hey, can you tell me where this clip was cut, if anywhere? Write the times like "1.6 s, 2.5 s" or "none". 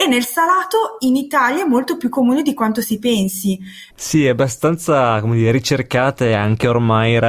3.9 s